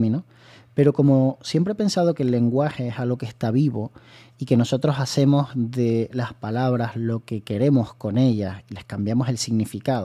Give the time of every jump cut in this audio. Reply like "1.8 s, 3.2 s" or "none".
none

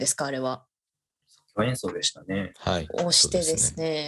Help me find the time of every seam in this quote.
none

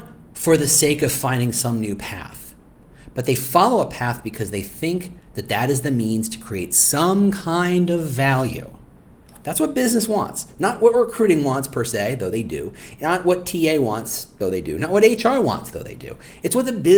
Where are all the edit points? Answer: none

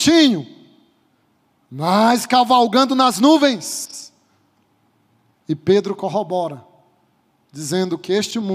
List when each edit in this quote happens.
5.4 s

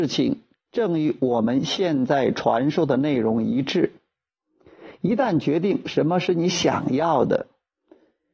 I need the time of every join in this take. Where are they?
none

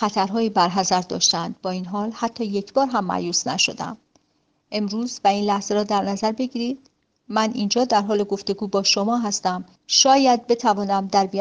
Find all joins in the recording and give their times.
9.8 s

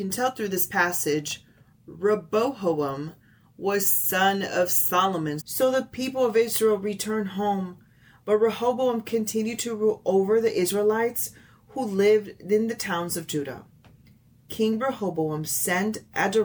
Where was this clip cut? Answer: 5.4 s

